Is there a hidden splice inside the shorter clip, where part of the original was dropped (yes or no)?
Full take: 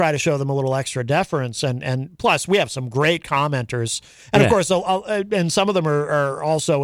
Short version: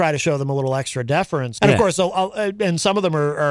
yes